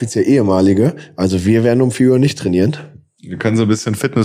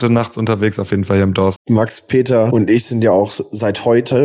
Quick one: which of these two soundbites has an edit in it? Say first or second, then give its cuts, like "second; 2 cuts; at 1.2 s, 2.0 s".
second; 1 cut; at 1.6 s